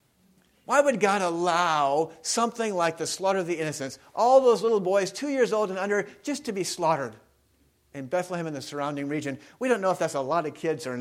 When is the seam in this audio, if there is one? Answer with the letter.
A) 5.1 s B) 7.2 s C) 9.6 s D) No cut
D